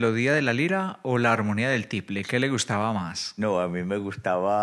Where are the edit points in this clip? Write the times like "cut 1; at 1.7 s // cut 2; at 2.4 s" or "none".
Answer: none